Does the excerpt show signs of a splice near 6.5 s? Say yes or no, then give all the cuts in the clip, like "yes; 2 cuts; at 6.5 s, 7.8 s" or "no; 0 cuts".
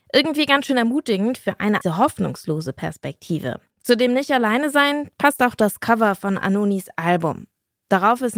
no; 2 cuts; at 1.8 s, 3.7 s